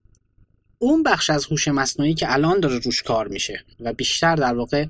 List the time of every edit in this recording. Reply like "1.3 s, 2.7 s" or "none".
3.7 s